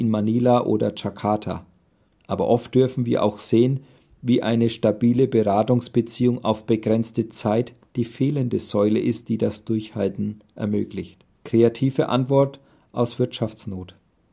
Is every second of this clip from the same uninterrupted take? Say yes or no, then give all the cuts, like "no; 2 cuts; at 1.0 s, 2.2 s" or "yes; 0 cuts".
no; 2 cuts; at 2.1 s, 11.3 s